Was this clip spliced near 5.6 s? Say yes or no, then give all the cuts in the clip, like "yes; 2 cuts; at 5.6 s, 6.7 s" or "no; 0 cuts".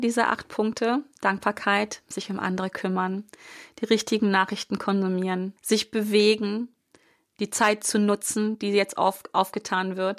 yes; 1 cut; at 5.6 s